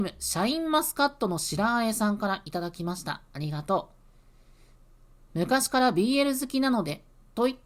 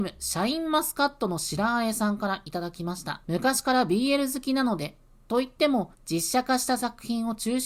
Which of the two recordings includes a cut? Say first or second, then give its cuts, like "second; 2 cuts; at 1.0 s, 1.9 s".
second; 2 cuts; at 3.2 s, 5.9 s